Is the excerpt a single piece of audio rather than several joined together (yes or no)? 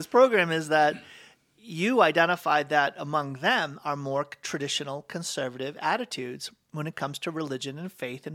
yes